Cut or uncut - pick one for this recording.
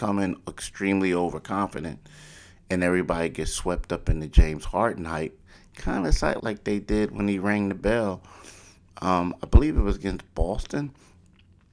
cut